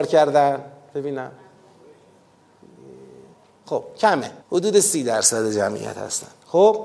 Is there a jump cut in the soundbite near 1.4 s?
no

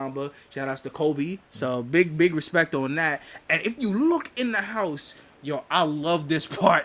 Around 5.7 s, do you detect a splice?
no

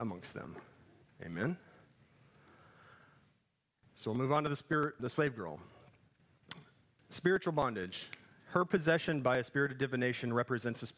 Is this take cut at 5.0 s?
yes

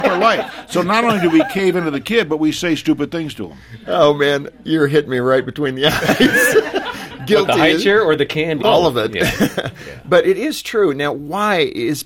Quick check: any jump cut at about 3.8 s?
no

